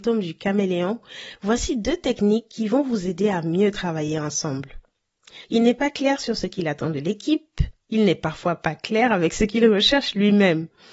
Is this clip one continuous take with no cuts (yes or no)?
no